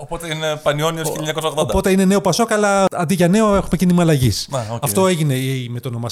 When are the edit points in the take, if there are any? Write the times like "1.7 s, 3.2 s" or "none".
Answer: none